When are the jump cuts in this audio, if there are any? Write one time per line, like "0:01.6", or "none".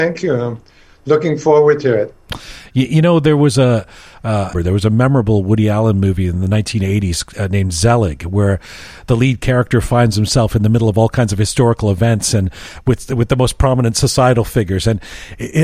0:04.5